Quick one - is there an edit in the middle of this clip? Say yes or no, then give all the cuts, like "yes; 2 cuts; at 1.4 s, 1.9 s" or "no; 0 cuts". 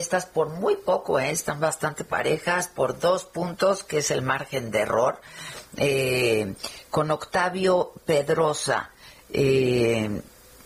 no; 0 cuts